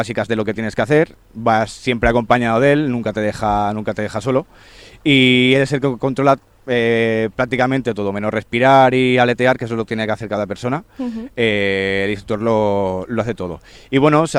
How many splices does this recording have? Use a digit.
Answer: 0